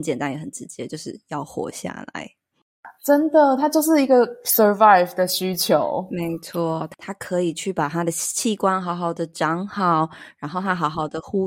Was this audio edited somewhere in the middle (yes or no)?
no